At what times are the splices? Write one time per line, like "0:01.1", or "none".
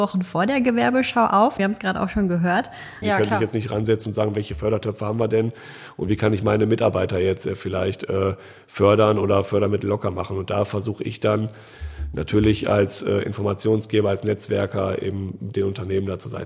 0:01.6
0:03.0